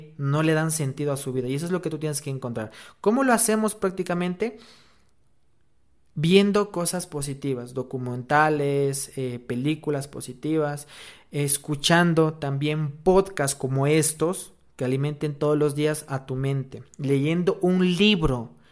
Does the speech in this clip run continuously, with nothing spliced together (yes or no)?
yes